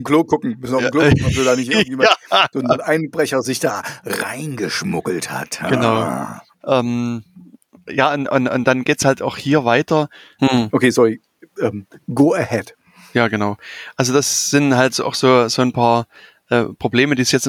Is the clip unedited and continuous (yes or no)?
no